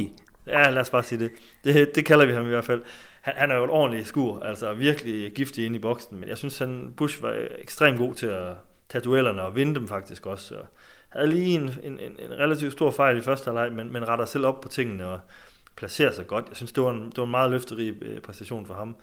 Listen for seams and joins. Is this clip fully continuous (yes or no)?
yes